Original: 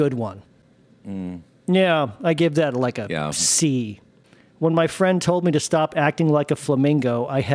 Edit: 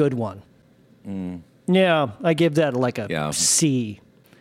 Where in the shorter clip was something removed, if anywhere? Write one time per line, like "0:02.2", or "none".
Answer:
none